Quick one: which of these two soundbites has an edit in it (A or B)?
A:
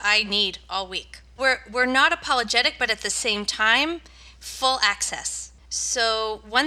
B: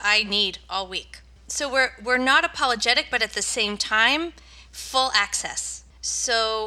A